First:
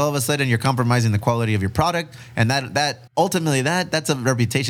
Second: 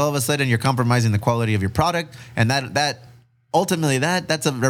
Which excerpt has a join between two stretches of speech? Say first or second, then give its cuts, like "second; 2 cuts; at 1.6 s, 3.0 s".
first; 1 cut; at 3.1 s